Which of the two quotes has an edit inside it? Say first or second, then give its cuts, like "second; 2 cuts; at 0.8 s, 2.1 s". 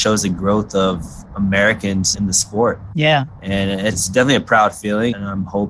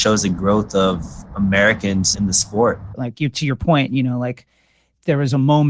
second; 1 cut; at 2.9 s